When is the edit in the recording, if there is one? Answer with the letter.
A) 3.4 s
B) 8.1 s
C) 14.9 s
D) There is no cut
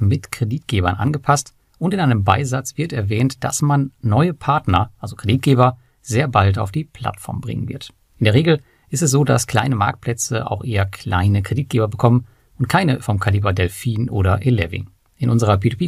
B